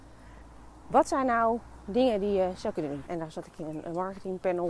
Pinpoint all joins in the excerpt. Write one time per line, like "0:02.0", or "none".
0:03.1